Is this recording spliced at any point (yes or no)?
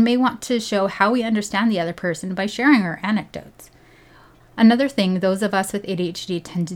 yes